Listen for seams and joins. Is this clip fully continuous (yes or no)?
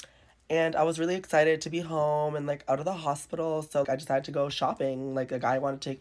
no